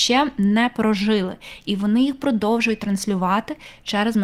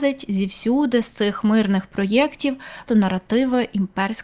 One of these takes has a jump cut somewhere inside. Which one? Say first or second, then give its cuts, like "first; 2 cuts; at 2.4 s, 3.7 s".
second; 1 cut; at 2.9 s